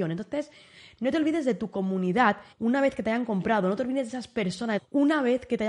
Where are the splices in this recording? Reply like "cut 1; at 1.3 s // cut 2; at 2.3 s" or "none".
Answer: cut 1; at 2.5 s // cut 2; at 4.8 s